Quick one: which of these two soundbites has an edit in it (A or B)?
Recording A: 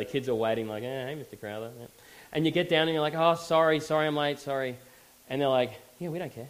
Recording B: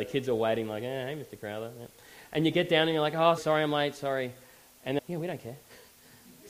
B